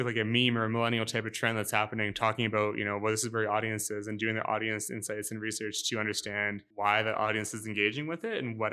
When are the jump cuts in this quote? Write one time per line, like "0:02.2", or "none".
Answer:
0:06.7